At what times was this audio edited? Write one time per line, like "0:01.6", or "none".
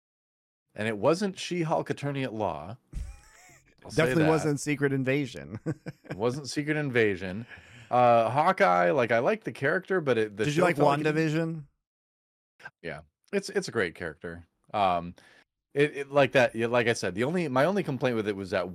0:12.7